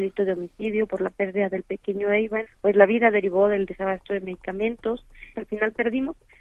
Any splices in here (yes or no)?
yes